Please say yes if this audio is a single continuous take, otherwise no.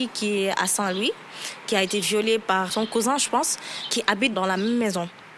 no